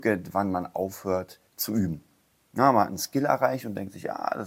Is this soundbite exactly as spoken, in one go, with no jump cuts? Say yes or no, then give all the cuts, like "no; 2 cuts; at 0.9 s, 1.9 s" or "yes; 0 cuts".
no; 1 cut; at 1.5 s